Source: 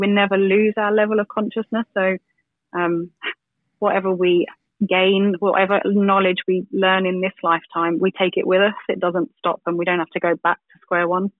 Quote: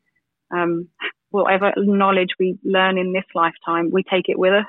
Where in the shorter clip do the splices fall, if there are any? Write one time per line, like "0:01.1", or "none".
0:01.3